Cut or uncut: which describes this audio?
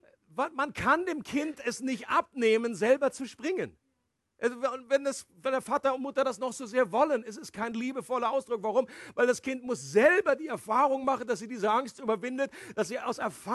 uncut